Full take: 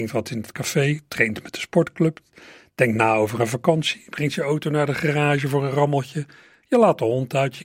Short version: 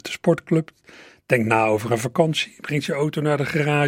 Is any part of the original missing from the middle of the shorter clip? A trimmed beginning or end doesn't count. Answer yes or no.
no